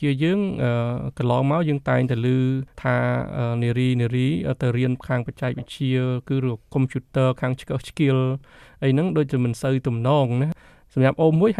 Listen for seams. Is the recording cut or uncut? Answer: uncut